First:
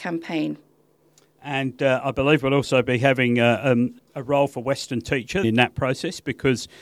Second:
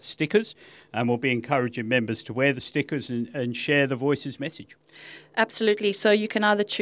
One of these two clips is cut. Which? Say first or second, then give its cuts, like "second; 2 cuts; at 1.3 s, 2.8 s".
first; 2 cuts; at 4.0 s, 5.4 s